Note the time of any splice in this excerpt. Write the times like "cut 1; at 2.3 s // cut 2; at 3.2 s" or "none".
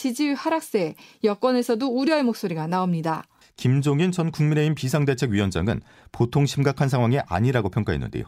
cut 1; at 3.4 s